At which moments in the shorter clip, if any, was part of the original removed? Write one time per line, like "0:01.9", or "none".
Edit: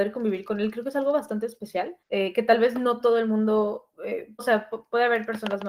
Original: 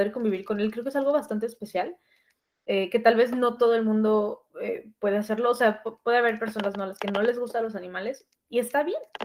0:02.0
0:04.4